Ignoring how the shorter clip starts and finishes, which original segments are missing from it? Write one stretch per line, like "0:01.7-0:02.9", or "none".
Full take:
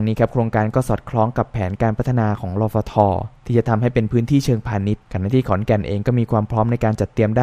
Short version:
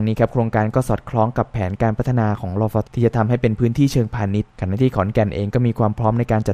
0:02.8-0:03.4